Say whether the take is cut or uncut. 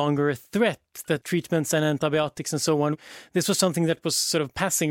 uncut